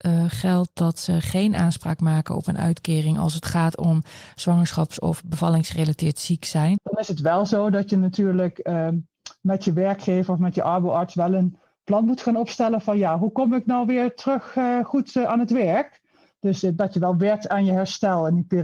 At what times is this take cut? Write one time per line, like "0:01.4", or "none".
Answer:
0:06.8